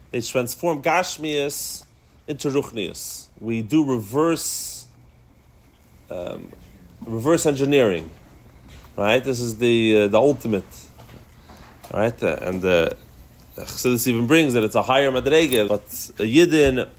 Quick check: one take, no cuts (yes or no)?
no